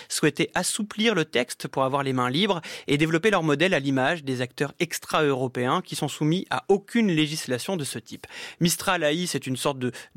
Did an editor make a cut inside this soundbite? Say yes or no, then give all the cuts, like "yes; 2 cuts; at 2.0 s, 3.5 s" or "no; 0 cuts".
no; 0 cuts